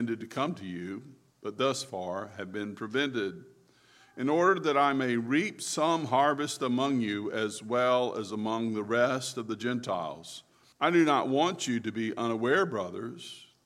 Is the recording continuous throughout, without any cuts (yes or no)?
no